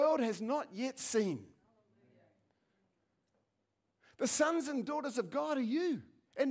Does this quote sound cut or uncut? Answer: uncut